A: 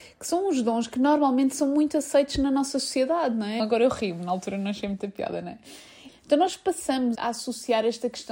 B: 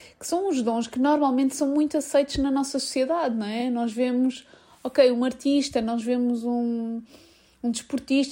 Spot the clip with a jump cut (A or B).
A